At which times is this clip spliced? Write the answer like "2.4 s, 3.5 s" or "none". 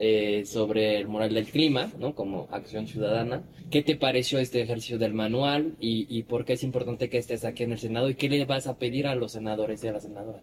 none